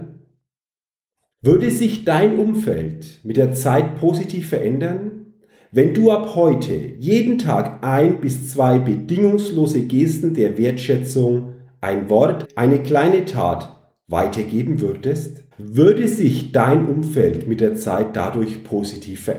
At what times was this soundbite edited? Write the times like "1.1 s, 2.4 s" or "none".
1.3 s, 12.4 s, 15.5 s